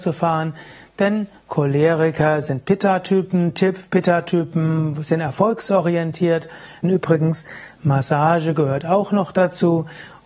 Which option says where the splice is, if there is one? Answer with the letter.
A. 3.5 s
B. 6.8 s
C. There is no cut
B